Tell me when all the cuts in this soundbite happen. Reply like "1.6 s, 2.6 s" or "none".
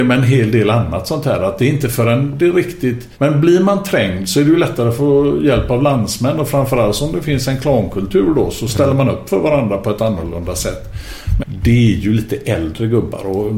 3.1 s, 11.4 s